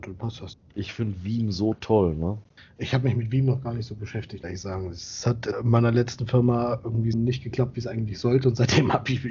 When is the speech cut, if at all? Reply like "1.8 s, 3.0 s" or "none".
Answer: 5.5 s, 7.1 s